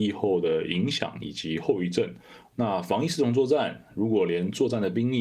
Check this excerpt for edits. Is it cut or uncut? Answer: cut